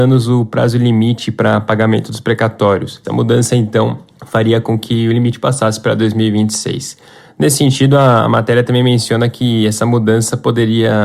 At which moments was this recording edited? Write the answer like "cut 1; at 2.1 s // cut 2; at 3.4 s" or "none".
cut 1; at 3.0 s